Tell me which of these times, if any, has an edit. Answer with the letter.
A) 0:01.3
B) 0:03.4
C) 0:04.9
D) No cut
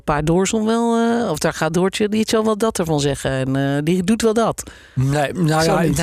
D